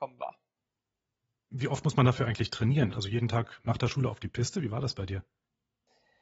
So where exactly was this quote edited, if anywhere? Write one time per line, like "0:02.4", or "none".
0:02.9